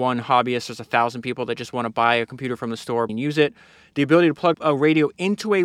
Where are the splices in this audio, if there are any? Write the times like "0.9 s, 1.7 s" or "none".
3.1 s, 4.5 s